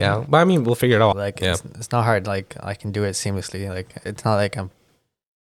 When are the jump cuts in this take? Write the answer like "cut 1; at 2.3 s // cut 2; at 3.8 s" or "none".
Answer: cut 1; at 1.1 s